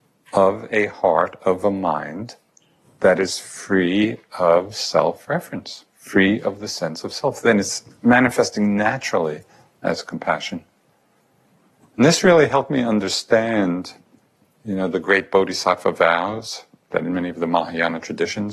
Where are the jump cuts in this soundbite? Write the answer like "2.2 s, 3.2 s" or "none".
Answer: none